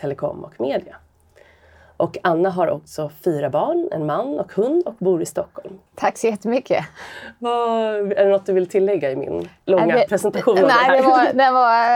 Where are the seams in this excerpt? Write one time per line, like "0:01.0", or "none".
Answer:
0:05.9